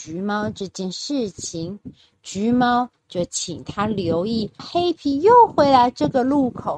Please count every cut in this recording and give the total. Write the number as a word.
one